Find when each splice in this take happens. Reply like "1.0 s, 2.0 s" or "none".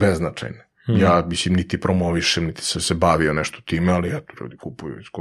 none